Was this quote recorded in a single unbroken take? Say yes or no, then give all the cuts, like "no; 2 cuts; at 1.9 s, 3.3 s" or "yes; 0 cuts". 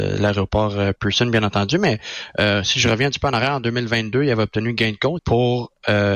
no; 1 cut; at 5.2 s